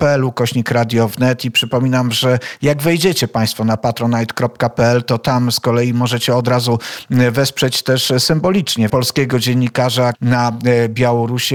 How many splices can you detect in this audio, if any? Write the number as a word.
two